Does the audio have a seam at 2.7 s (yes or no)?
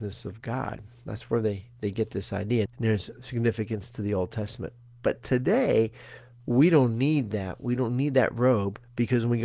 yes